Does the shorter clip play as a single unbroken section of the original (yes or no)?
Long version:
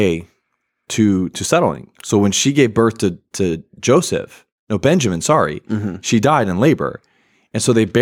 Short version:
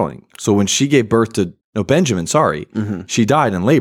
no